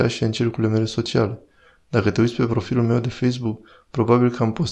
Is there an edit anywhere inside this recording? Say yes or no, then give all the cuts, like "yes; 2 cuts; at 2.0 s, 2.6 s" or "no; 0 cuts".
no; 0 cuts